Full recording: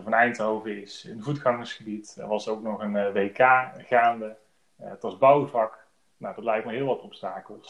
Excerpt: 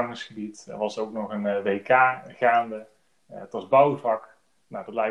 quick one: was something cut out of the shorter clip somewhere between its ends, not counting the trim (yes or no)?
no